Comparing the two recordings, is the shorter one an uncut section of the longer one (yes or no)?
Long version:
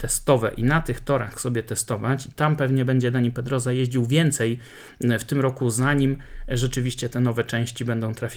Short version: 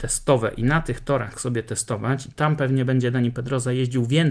yes